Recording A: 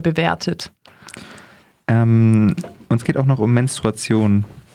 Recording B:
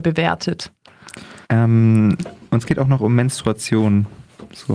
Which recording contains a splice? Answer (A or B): B